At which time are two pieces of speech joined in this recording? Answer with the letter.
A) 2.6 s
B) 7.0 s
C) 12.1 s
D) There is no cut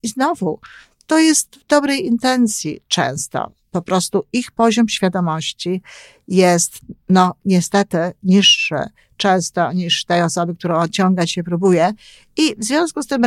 D